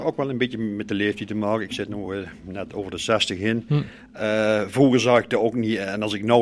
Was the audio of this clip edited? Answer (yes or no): no